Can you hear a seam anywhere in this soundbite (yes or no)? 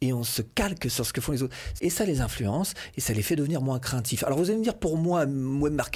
yes